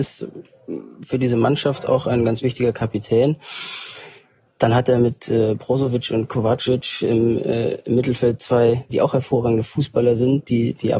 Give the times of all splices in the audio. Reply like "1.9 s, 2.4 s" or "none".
8.9 s